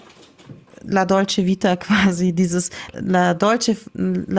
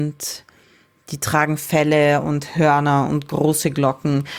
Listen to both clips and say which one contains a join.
first; 1 cut; at 2.9 s

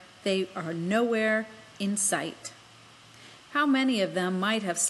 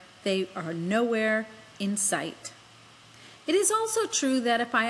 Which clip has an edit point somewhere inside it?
first; 1 cut; at 3.4 s

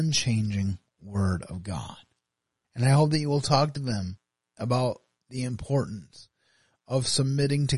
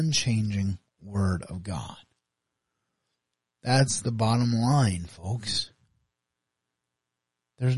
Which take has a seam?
first; 1 cut; at 2.6 s

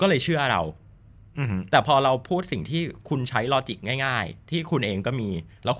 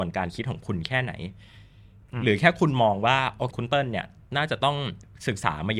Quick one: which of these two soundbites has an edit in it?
second; 1 cut; at 3.5 s

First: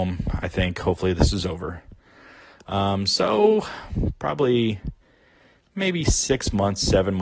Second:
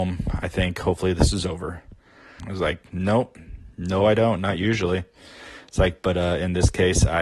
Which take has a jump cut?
second; 1 cut; at 2.4 s

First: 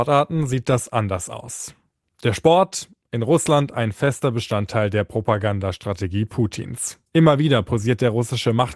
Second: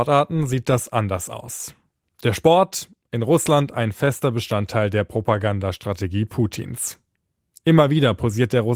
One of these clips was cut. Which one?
first; 1 cut; at 7.1 s

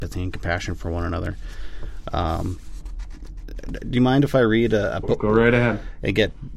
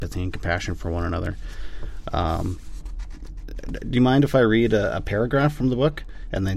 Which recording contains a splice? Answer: first; 1 cut; at 5.0 s

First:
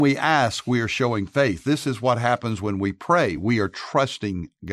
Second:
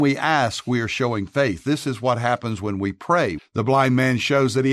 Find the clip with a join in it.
second; 1 cut; at 3.4 s

